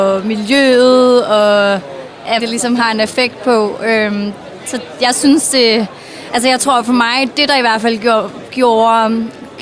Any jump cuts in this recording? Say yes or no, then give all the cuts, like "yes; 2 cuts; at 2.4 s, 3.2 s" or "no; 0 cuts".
yes; 1 cut; at 2.4 s